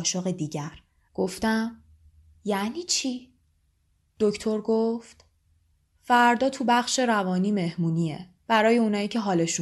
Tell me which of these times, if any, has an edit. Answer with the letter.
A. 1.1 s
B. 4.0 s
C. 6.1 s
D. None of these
A